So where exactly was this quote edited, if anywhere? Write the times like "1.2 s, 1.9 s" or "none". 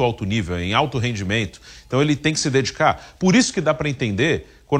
none